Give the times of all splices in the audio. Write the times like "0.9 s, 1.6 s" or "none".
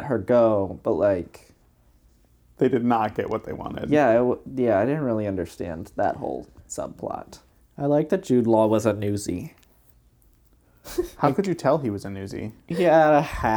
none